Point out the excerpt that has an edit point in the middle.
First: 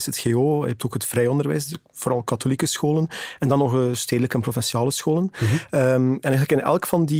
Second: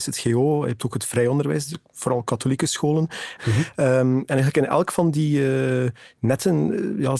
second; 1 cut; at 3.4 s

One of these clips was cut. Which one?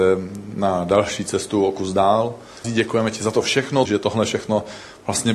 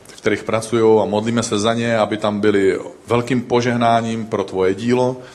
first; 2 cuts; at 2.6 s, 3.9 s

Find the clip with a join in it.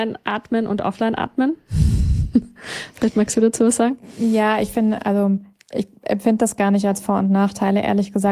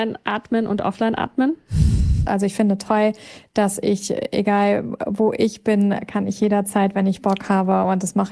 second; 1 cut; at 2.2 s

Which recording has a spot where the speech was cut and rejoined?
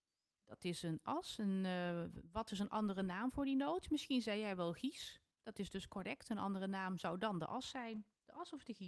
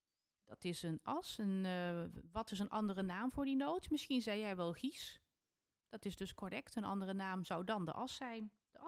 first; 1 cut; at 5.3 s

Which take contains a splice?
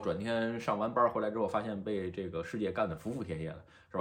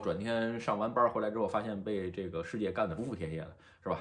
second; 1 cut; at 3.0 s

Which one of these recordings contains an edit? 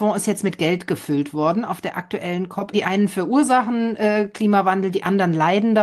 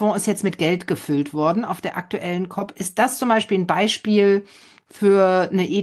first; 1 cut; at 2.7 s

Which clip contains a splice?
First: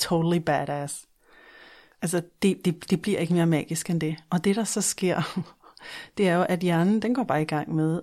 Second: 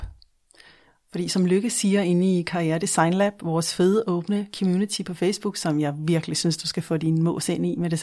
first; 1 cut; at 1.9 s

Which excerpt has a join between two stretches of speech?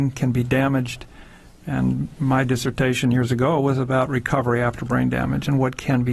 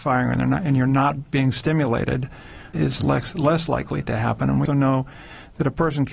second; 2 cuts; at 2.7 s, 4.7 s

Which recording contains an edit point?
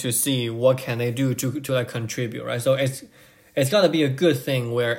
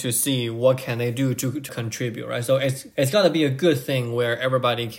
second; 2 cuts; at 1.7 s, 2.9 s

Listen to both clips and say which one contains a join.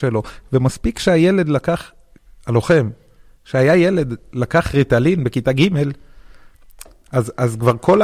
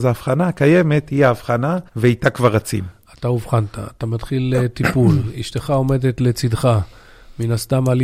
second; 1 cut; at 1.9 s

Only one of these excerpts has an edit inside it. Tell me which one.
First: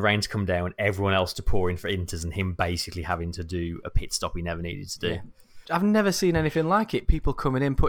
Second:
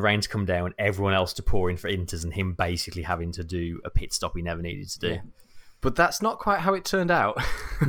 first; 1 cut; at 5.6 s

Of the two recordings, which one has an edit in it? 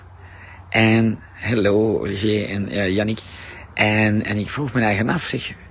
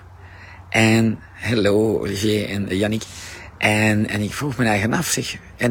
second; 1 cut; at 2.7 s

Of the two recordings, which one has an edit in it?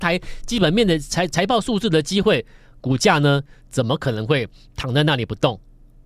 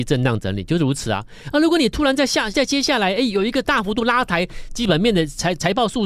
second; 2 cuts; at 2.5 s, 3.6 s

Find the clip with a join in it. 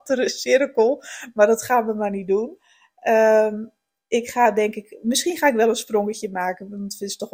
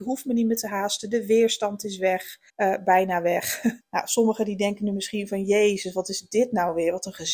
second; 2 cuts; at 2.5 s, 3.8 s

